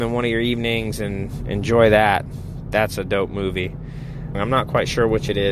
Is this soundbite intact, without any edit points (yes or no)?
no